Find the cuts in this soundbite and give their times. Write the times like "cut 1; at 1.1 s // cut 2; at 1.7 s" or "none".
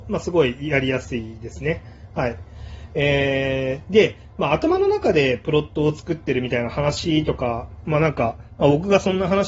none